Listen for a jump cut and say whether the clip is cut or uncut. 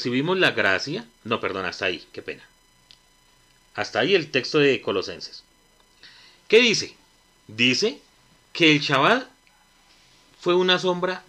uncut